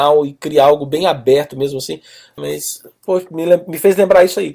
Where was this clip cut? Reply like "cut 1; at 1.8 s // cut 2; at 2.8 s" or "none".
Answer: cut 1; at 2.4 s